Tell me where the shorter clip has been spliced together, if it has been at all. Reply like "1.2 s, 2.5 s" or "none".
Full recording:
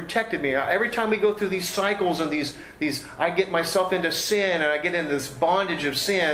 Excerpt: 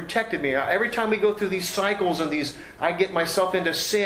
2.8 s